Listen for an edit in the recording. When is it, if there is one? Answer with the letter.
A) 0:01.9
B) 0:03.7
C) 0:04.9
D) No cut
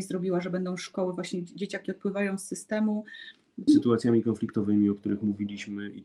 B